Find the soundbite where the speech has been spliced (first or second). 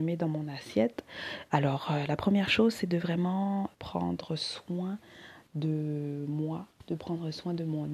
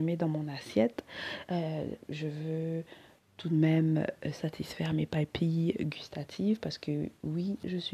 first